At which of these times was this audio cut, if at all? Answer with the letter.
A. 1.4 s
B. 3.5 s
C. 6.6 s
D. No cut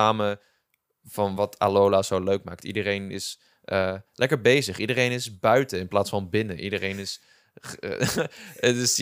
A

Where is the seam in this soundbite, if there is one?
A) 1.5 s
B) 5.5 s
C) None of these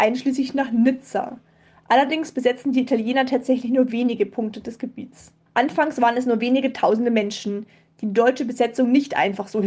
B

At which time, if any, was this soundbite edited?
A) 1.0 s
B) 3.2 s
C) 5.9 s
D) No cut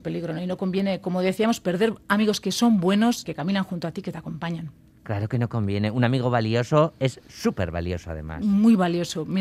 B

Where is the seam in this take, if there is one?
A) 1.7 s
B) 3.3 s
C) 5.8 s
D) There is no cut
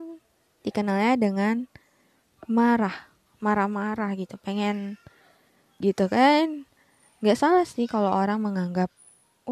C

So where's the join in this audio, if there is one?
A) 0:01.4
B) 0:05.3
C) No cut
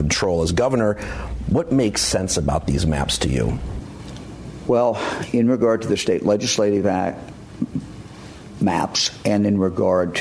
C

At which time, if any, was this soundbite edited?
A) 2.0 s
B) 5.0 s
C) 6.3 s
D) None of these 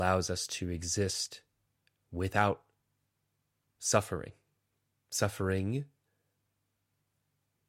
D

